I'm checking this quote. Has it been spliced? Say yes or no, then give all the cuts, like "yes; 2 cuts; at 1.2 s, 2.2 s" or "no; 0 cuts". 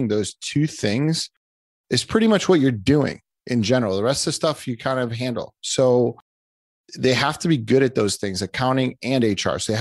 no; 0 cuts